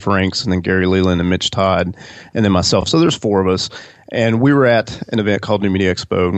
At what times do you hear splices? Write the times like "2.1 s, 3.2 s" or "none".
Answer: none

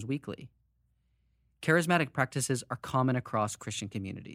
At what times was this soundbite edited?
none

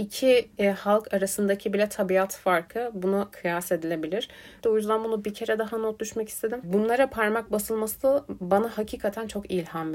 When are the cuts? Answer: 4.6 s, 6.6 s

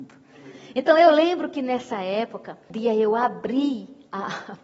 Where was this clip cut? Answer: 2.7 s

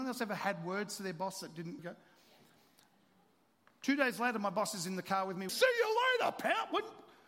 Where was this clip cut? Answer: 1.8 s, 5.5 s

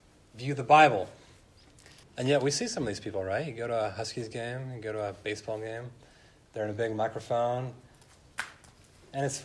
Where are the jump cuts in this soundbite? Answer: 2.0 s

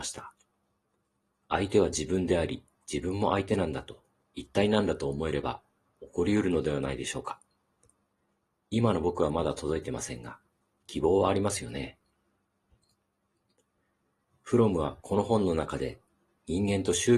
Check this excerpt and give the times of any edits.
none

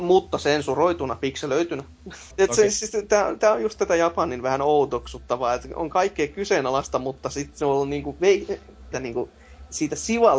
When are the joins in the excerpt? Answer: 2.3 s, 8.9 s

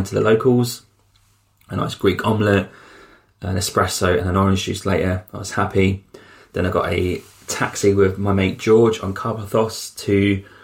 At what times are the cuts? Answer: none

